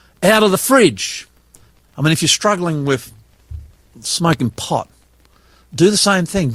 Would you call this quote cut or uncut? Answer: cut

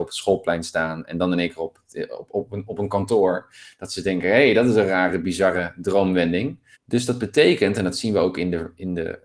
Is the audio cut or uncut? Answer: cut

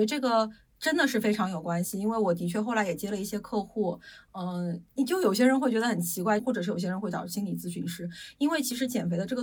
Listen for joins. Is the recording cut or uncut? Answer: cut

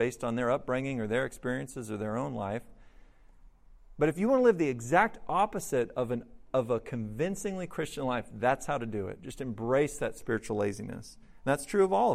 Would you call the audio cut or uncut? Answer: uncut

